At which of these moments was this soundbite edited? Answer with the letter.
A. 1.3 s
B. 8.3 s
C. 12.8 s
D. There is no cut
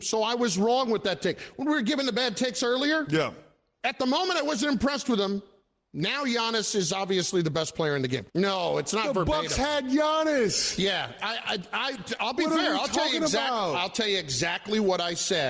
B